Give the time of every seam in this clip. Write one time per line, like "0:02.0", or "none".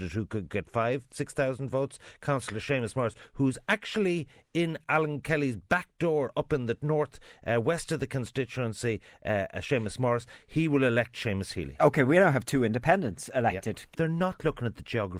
0:13.9